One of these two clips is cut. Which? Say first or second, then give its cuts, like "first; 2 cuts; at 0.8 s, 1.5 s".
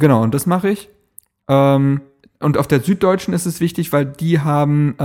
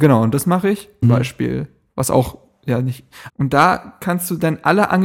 second; 2 cuts; at 1.0 s, 3.3 s